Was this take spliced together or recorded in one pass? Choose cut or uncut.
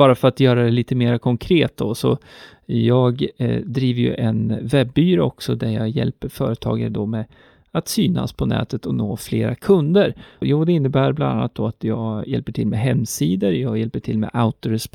cut